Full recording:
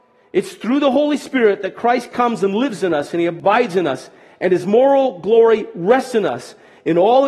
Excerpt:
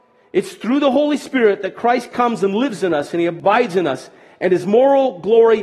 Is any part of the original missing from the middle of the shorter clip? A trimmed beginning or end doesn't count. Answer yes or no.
no